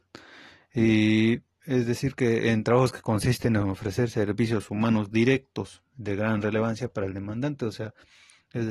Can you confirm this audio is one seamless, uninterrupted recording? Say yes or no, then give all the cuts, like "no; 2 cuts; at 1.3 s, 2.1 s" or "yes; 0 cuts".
yes; 0 cuts